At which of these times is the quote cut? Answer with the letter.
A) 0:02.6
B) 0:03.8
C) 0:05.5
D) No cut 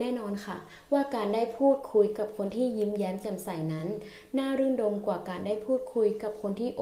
D